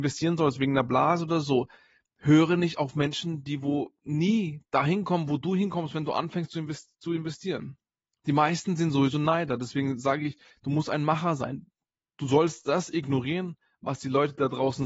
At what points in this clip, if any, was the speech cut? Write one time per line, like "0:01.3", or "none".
0:04.0

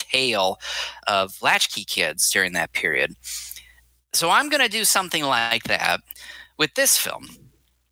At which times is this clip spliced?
none

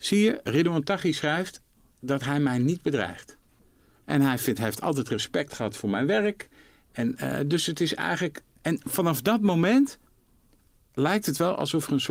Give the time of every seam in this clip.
none

